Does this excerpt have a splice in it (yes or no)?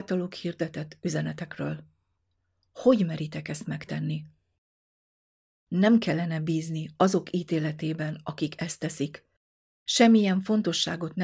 no